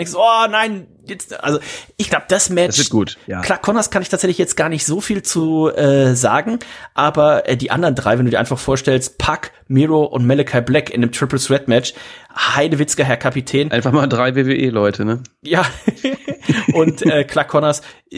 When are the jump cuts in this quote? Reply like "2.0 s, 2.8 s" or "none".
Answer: 3.4 s